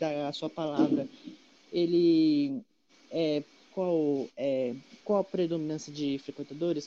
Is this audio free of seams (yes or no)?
no